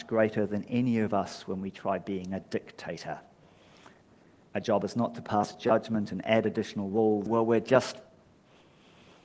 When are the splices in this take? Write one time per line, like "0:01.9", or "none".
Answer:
0:07.3